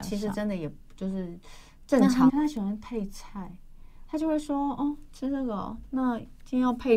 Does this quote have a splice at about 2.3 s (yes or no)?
yes